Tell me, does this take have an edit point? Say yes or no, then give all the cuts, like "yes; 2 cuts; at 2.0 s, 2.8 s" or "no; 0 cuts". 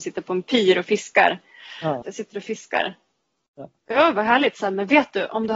yes; 1 cut; at 2.0 s